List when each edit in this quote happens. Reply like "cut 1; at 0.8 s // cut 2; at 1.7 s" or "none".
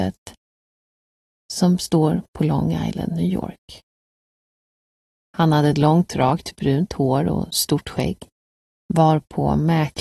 cut 1; at 5.3 s // cut 2; at 8.8 s